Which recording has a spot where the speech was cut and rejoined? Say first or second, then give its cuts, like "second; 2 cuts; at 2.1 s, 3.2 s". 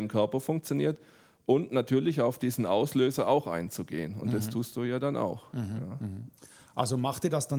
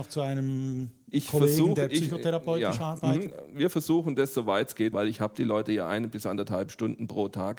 second; 1 cut; at 4.9 s